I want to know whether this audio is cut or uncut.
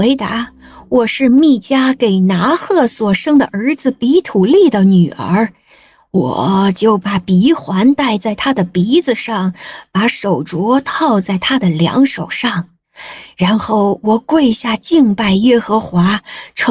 uncut